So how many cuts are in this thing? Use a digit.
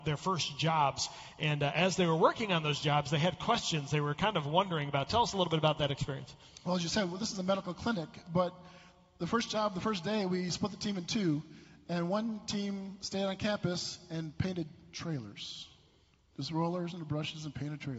0